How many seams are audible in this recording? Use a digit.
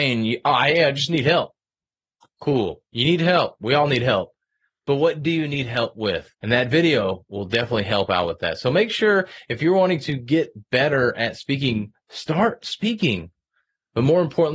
1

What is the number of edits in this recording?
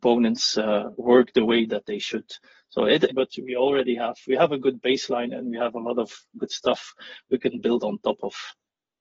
2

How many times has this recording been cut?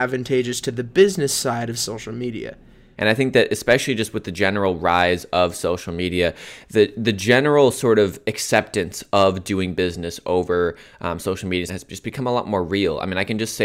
2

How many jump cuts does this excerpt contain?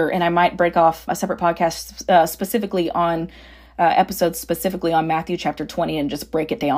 1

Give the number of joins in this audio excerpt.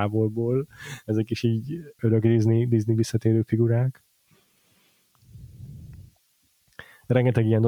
1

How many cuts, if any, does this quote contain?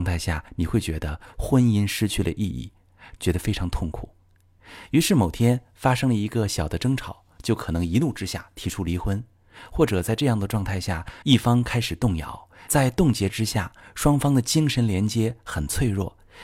3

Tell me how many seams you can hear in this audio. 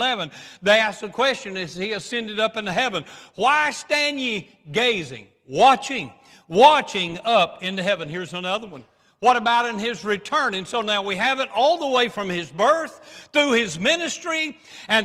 0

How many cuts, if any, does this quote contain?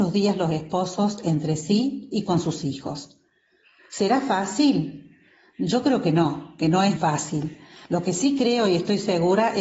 1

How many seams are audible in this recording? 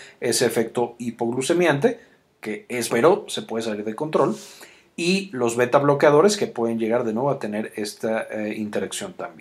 1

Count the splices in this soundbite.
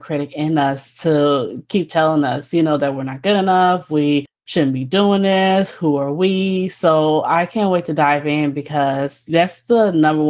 0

